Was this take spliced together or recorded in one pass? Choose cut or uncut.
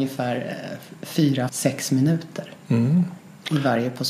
cut